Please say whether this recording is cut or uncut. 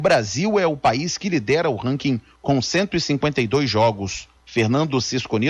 cut